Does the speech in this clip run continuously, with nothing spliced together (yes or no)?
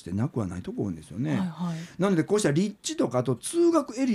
yes